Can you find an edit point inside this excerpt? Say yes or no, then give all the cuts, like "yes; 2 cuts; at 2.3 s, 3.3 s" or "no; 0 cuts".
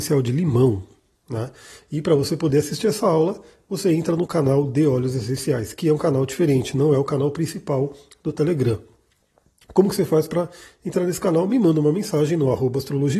no; 0 cuts